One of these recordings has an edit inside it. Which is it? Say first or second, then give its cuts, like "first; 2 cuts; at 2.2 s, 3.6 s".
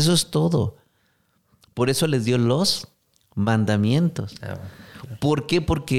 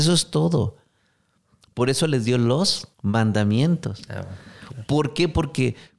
second; 1 cut; at 2.9 s